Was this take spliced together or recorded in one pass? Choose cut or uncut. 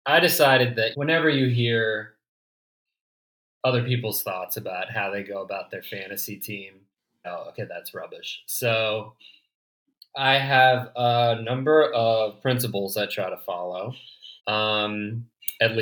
cut